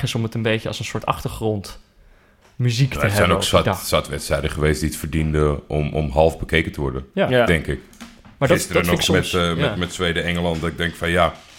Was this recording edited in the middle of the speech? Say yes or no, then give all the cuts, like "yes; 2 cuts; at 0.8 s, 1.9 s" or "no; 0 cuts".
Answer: no; 0 cuts